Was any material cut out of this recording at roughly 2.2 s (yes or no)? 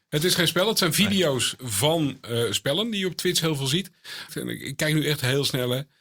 no